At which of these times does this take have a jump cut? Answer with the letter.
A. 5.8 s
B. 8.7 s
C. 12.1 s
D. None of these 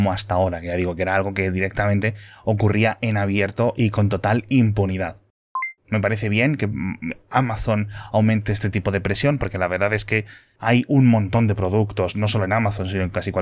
A